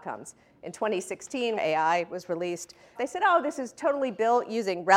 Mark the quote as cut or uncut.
cut